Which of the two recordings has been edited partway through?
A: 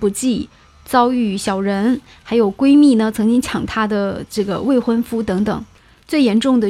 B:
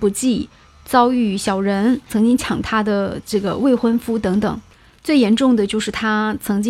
B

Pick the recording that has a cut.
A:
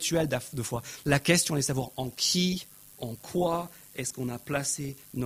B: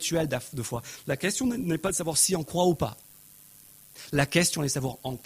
A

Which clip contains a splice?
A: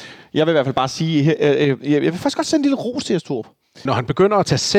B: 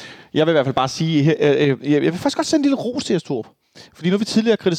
A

